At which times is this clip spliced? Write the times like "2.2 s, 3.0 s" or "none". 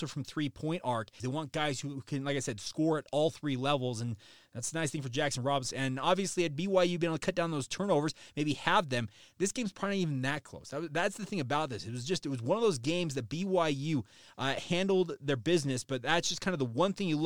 1.2 s, 5.7 s